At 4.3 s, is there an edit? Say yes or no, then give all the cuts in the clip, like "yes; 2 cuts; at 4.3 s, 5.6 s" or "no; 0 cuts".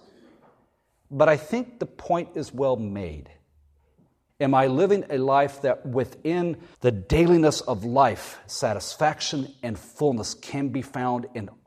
yes; 2 cuts; at 4.3 s, 6.7 s